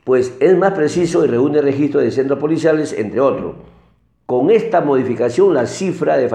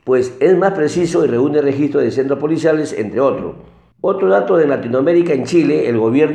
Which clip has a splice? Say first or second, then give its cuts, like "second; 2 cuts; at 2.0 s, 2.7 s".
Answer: second; 1 cut; at 3.9 s